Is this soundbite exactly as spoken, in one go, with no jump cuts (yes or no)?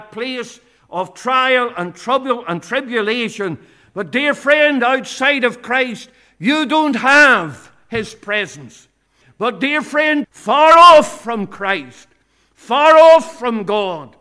no